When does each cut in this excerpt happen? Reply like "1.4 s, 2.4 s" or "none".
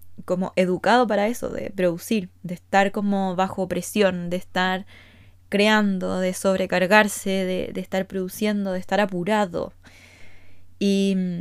none

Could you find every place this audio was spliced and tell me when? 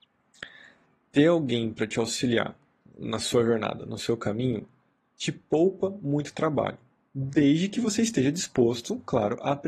none

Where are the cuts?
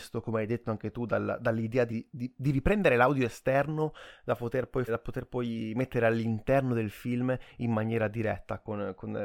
1.9 s, 4.9 s

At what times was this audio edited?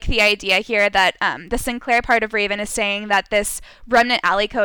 none

